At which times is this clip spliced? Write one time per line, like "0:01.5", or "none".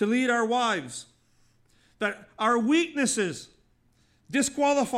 none